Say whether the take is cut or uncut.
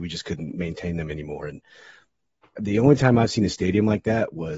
uncut